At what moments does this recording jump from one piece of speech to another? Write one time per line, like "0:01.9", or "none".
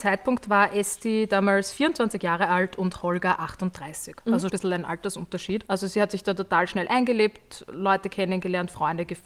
0:04.5
0:05.7